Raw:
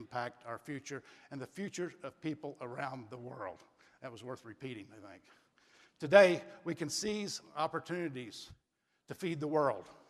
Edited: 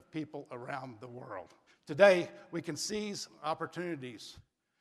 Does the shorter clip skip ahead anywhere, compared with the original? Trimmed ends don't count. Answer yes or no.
yes